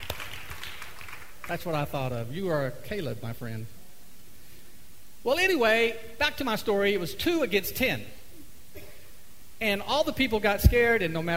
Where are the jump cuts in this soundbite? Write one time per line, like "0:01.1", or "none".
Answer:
none